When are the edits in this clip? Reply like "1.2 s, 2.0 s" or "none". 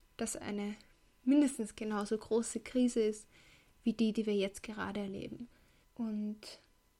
5.8 s